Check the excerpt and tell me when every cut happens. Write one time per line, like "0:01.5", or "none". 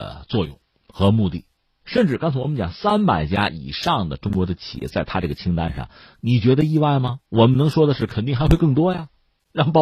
0:01.8